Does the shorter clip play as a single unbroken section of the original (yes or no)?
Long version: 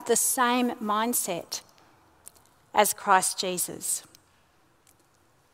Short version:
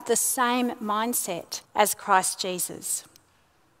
no